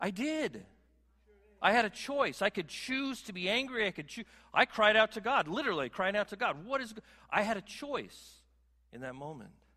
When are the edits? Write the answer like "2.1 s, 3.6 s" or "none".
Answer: none